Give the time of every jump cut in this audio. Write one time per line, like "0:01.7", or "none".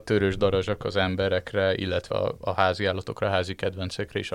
none